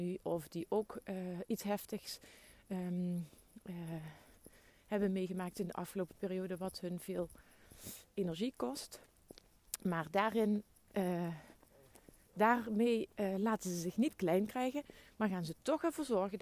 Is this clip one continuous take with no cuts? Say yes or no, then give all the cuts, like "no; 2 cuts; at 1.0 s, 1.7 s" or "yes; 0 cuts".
yes; 0 cuts